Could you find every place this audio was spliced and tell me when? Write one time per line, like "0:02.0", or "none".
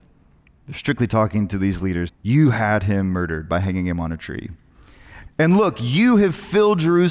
0:02.1
0:05.3